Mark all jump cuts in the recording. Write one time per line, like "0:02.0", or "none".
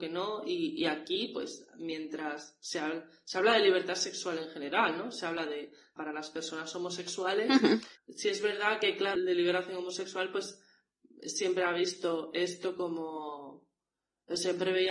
0:06.0
0:08.0
0:09.2